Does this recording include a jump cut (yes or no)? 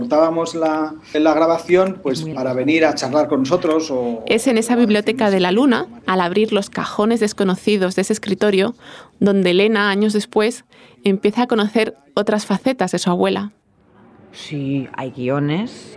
yes